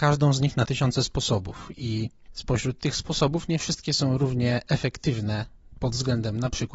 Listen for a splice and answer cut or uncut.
uncut